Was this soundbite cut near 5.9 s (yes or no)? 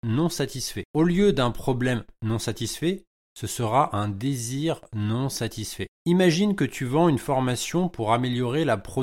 yes